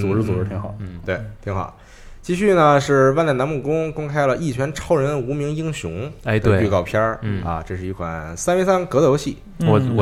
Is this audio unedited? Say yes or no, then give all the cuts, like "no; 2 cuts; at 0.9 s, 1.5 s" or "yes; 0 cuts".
yes; 0 cuts